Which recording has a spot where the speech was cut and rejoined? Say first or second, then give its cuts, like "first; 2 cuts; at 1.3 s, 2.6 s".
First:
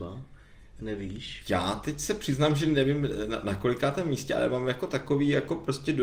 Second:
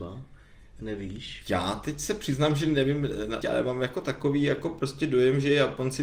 second; 1 cut; at 3.4 s